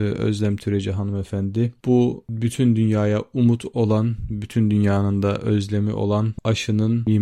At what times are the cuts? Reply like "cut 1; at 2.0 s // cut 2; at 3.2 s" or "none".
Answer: none